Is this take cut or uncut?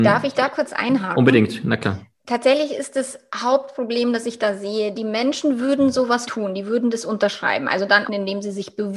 cut